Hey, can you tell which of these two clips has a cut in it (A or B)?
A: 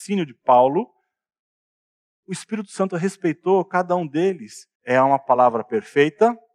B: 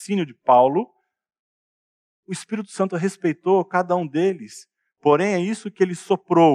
A